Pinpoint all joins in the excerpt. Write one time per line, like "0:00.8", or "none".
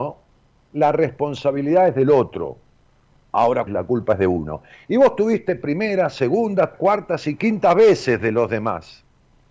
0:03.7
0:06.7